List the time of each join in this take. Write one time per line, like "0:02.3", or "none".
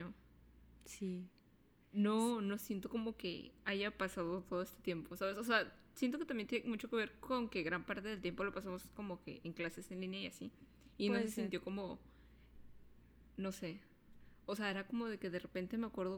none